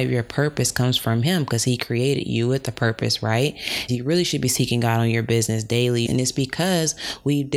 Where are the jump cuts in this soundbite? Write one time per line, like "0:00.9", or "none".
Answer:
0:03.9
0:06.1